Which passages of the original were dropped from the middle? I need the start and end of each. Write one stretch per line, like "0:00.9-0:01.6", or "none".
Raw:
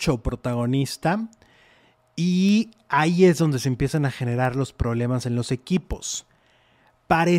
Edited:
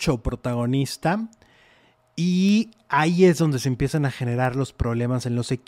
none